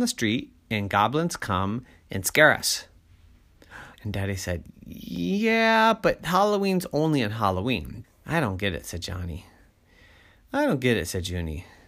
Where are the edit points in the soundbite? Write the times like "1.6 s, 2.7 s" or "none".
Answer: 3.9 s, 8.0 s